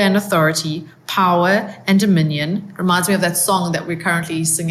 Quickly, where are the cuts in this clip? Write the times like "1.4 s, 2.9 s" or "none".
none